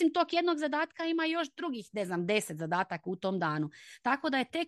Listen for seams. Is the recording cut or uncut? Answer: uncut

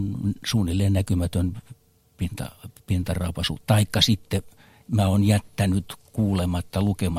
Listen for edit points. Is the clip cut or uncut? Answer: uncut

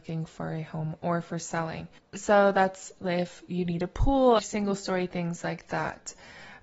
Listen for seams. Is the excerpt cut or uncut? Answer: cut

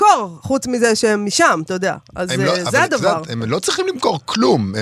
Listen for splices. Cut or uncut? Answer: uncut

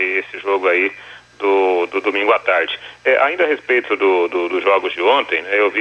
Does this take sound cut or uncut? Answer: uncut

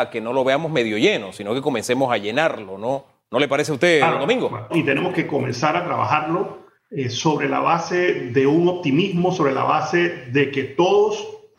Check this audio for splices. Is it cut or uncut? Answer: cut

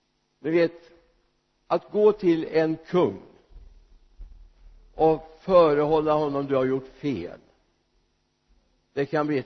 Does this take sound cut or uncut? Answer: uncut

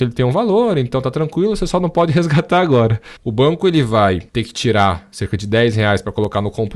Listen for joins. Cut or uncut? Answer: cut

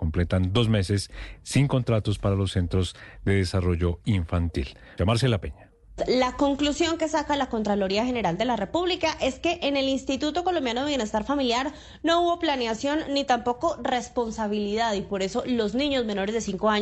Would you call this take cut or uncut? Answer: cut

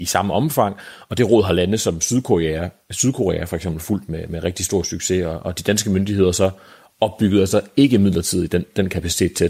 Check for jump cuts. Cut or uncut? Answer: uncut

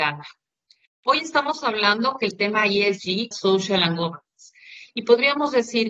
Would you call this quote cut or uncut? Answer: cut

